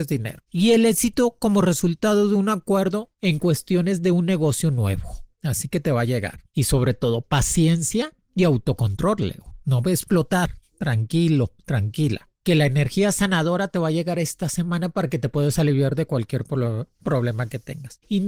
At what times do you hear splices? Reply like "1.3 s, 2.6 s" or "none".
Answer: none